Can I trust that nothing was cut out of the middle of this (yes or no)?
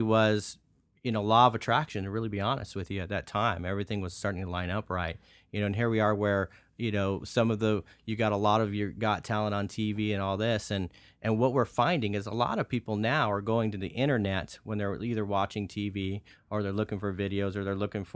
yes